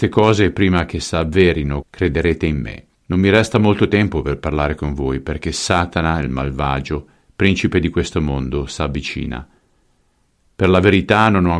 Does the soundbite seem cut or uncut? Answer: cut